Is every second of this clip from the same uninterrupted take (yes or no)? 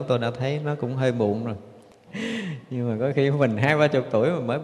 no